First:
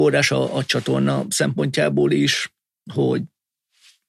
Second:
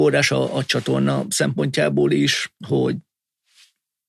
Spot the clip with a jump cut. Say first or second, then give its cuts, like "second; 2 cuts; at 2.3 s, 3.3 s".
second; 1 cut; at 2.6 s